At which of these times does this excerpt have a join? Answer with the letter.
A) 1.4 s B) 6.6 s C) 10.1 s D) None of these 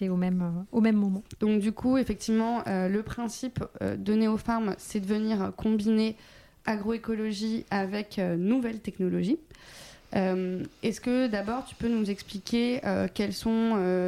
A